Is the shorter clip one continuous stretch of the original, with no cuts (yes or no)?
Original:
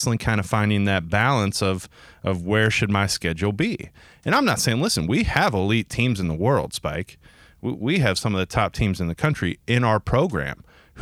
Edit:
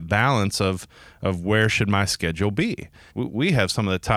no